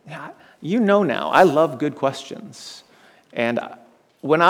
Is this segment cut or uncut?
uncut